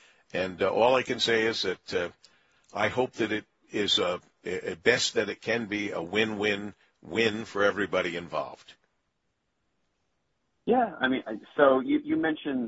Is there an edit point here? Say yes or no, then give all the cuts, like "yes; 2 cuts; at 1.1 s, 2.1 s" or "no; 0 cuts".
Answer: no; 0 cuts